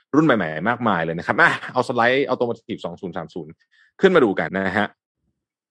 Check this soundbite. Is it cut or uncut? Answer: cut